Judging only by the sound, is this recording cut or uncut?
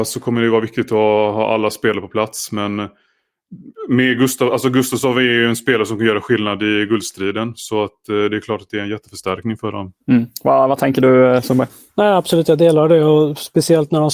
cut